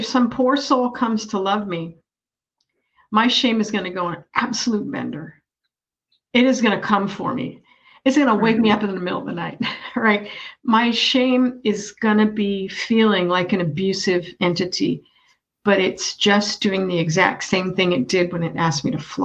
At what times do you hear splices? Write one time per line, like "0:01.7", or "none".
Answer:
none